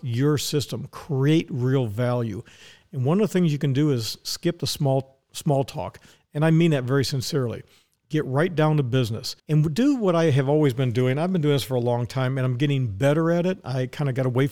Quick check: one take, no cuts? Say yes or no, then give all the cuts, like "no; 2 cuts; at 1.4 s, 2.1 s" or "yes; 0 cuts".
no; 1 cut; at 9.4 s